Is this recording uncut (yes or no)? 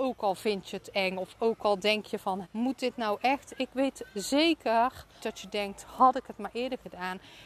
no